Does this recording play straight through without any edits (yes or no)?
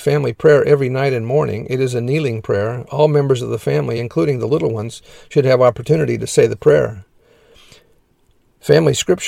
yes